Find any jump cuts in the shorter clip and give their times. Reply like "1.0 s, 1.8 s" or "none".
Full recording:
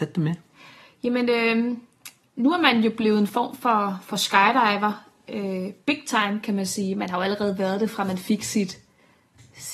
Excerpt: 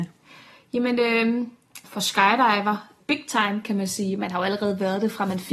1.8 s, 3.0 s